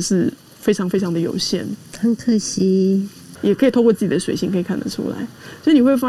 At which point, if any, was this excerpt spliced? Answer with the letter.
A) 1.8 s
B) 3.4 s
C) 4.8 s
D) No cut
B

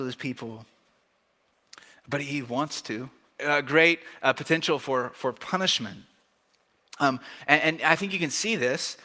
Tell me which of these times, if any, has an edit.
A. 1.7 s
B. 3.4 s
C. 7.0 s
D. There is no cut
B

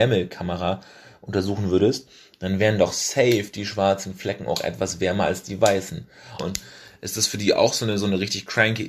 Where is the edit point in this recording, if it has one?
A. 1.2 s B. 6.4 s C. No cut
B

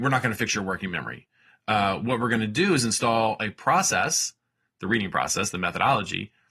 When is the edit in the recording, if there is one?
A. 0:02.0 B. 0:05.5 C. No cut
B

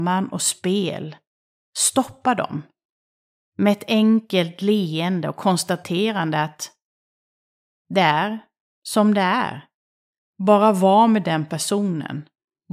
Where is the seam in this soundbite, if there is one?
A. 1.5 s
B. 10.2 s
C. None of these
B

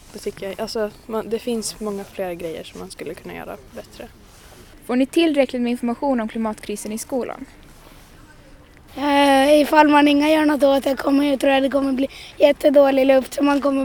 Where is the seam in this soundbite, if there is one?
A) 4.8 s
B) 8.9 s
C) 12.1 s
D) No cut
B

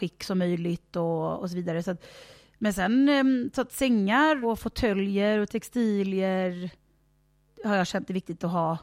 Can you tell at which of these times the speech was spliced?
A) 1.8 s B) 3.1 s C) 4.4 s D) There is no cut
C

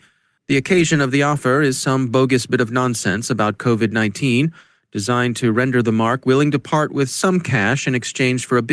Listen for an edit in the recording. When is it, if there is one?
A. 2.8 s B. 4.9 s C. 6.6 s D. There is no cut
D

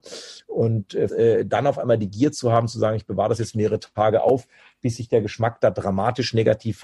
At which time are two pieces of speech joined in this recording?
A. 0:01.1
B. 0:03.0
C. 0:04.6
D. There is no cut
A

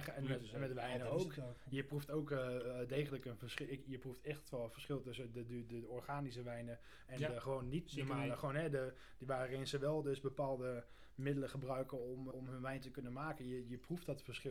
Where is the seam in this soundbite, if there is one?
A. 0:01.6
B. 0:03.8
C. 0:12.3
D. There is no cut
C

